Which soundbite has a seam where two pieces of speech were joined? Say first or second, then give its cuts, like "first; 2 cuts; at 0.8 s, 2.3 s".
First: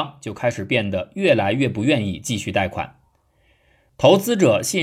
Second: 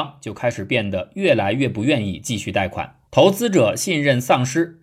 second; 1 cut; at 3.1 s